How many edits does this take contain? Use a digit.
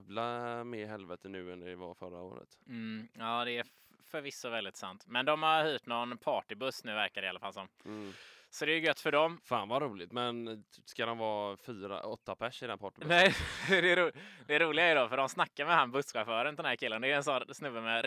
0